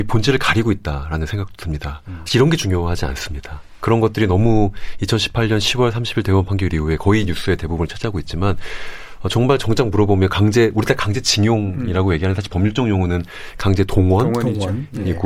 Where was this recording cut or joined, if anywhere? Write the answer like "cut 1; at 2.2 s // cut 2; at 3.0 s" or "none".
cut 1; at 2.3 s